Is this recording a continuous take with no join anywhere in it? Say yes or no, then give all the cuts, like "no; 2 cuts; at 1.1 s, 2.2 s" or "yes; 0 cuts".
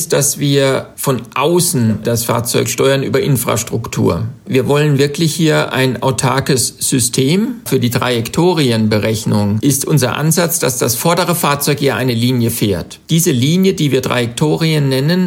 yes; 0 cuts